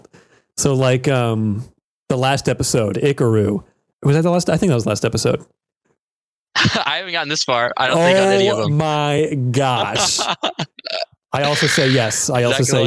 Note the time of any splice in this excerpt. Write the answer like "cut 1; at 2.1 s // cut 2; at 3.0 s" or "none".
cut 1; at 3.9 s // cut 2; at 5.8 s